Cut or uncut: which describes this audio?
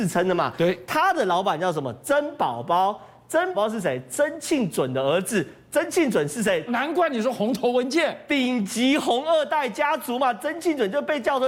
cut